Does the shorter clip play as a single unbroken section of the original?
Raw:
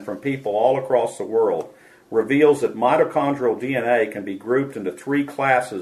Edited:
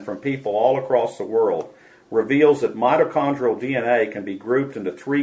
yes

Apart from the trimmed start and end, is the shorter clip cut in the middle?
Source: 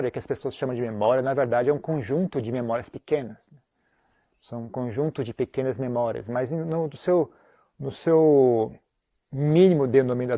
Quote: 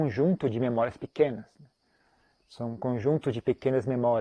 no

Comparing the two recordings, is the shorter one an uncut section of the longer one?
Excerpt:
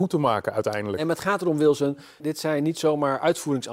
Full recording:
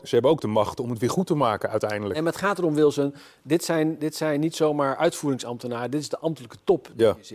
no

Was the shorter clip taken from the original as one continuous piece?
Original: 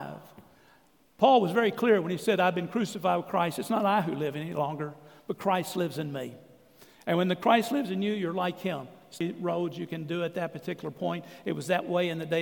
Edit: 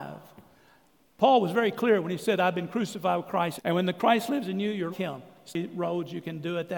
no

